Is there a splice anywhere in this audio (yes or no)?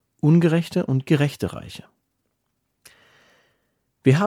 no